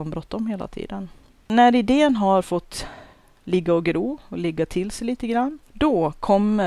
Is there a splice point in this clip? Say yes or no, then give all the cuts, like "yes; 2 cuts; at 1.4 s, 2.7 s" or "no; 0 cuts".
yes; 1 cut; at 5.6 s